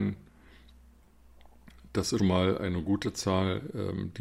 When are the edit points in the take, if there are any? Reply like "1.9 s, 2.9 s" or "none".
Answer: 2.2 s